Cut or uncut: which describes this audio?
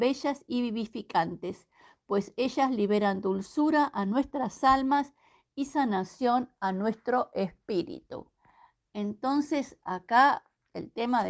uncut